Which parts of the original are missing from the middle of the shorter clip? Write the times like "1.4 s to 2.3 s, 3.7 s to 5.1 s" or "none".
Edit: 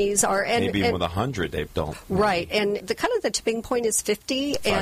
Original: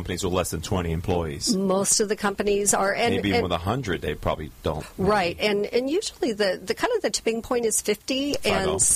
4.2 s to 4.6 s, 5.7 s to 6.6 s